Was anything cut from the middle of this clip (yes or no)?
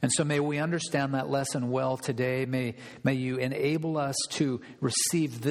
no